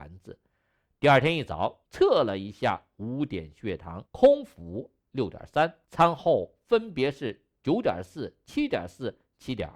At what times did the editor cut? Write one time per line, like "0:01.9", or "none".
0:01.8
0:04.0
0:05.8